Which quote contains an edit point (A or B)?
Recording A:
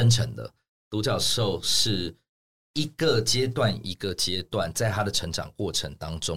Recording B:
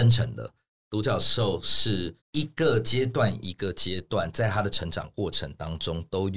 B